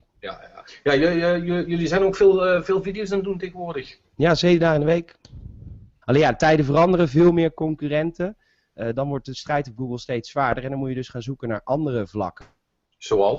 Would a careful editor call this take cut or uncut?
cut